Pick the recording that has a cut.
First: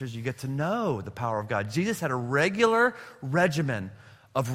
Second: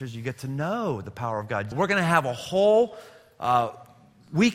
second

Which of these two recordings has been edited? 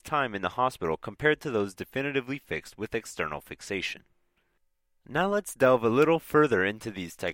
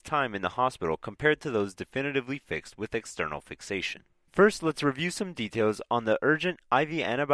second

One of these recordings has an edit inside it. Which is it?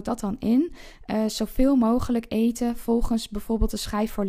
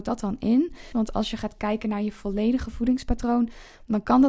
second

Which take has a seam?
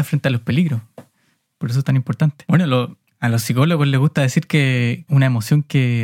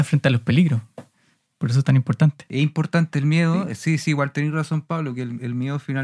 first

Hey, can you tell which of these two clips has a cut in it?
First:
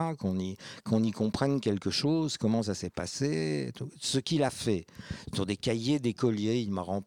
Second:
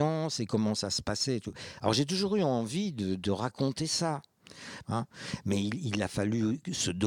second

